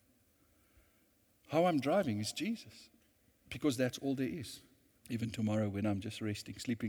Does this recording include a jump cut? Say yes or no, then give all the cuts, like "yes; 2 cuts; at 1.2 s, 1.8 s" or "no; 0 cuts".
yes; 1 cut; at 5.0 s